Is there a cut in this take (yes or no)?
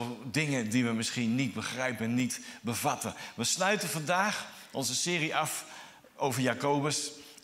no